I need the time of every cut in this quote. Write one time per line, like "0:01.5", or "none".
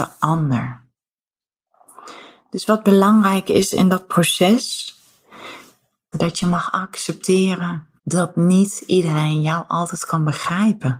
0:06.1
0:08.0